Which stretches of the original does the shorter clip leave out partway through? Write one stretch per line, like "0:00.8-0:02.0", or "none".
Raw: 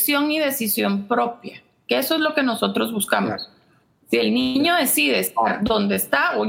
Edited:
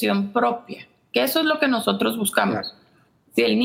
none